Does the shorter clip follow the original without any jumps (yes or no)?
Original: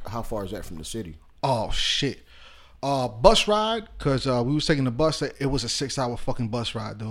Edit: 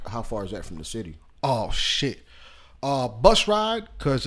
yes